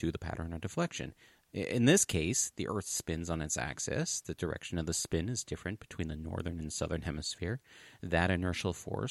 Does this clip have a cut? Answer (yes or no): no